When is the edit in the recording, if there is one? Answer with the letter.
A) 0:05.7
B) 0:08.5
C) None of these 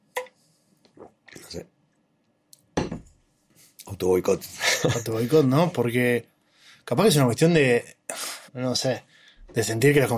B